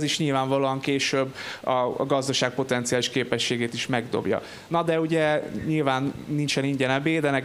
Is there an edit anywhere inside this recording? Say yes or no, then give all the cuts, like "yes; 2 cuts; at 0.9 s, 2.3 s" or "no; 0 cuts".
no; 0 cuts